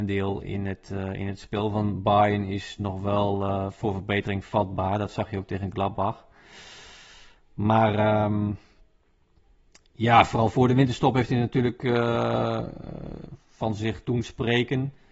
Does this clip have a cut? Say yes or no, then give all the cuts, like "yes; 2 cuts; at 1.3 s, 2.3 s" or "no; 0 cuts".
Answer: no; 0 cuts